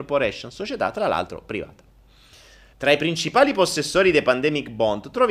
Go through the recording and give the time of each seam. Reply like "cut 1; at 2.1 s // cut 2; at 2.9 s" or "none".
cut 1; at 2.7 s